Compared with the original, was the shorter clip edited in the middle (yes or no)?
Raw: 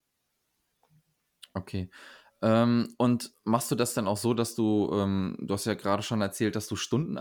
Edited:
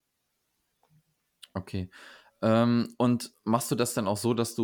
no